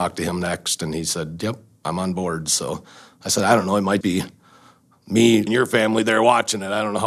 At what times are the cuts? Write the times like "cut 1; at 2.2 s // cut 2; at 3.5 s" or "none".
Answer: cut 1; at 4.0 s // cut 2; at 5.5 s